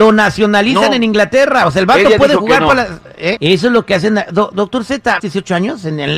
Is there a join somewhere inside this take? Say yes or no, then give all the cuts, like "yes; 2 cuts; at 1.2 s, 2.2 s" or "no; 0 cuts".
yes; 2 cuts; at 3.4 s, 5.2 s